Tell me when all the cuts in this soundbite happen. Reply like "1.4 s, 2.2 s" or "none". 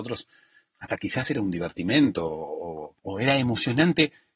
3.0 s

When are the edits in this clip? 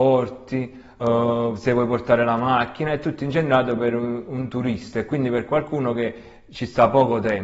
none

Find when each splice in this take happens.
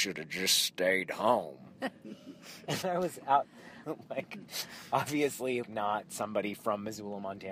2.8 s, 3.8 s, 5.6 s

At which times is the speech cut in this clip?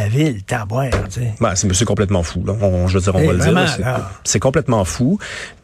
none

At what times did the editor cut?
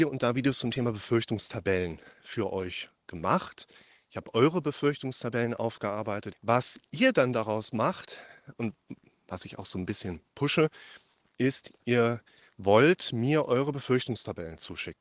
6.3 s

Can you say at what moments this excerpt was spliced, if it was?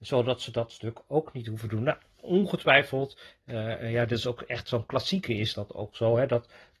none

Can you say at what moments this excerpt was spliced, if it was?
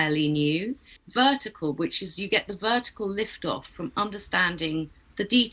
1.0 s

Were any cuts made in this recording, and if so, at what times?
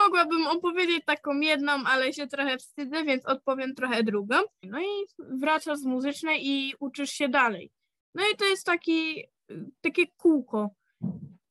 4.6 s

